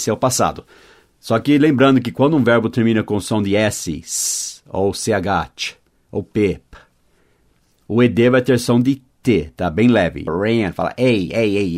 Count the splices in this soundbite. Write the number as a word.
one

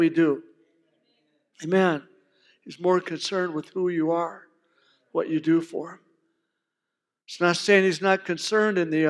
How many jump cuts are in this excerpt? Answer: zero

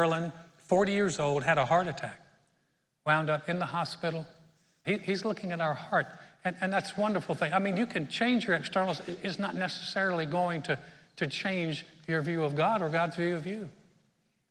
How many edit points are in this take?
one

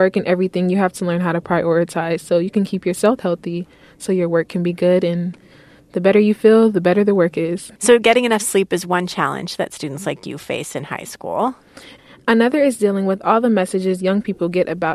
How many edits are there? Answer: one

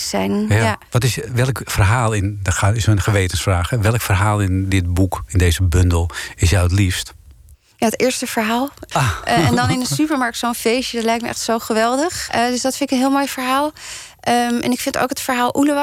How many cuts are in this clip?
two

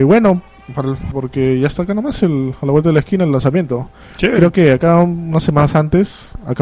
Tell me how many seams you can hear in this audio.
one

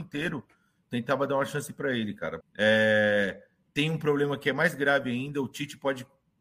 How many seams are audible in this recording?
one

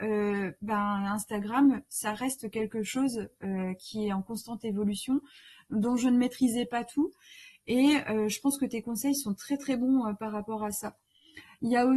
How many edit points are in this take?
zero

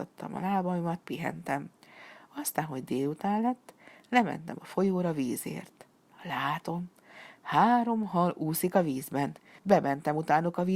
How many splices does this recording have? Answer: one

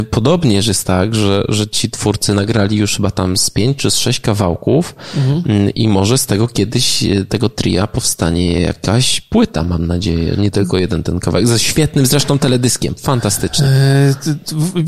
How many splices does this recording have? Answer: zero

